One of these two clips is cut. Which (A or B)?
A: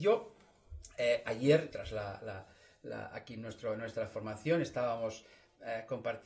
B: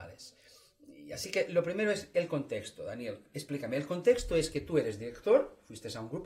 A